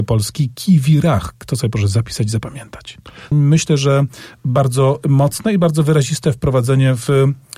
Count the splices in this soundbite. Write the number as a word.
one